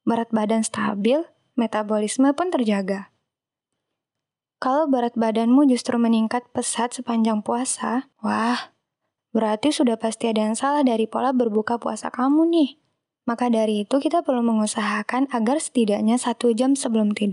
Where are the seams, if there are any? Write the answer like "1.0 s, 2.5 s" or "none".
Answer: 8.1 s, 13.2 s